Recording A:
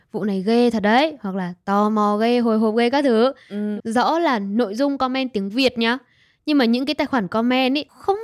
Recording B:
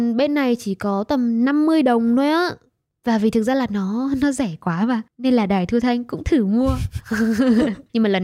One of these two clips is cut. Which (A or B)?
A